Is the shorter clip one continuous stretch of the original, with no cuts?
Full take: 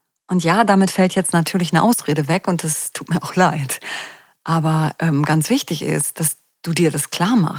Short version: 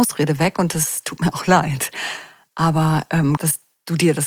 no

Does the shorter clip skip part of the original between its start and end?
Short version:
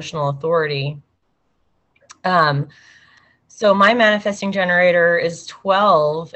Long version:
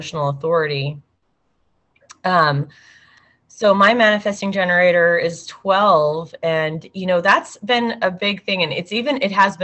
no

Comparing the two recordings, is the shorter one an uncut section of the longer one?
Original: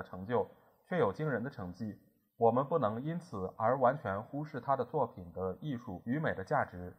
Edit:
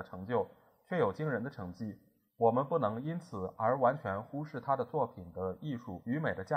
yes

